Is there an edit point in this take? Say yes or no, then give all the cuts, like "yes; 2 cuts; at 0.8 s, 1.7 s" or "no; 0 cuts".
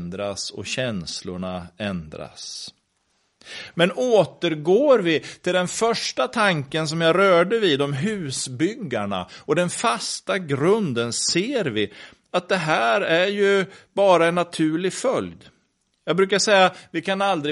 no; 0 cuts